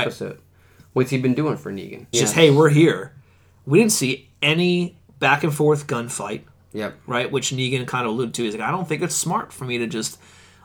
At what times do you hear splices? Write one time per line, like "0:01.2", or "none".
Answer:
0:02.1